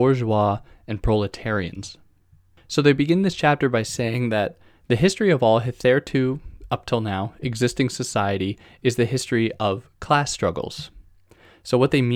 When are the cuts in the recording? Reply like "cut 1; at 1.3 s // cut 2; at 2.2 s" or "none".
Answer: none